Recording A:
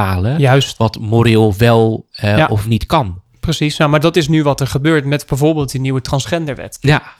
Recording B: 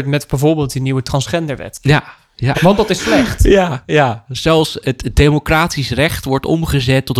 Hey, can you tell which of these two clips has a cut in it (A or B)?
B